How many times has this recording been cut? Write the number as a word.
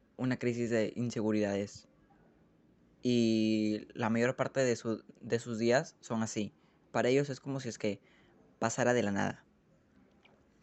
one